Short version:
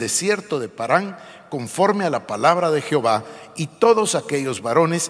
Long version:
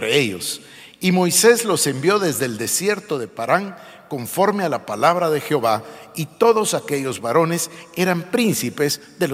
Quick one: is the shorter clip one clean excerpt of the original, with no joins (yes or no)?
yes